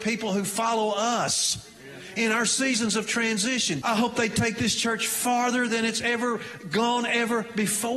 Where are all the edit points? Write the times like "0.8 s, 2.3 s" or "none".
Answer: 3.8 s